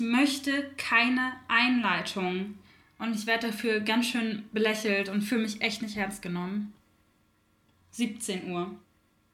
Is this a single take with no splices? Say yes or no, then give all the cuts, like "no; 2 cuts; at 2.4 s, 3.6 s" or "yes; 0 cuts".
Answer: yes; 0 cuts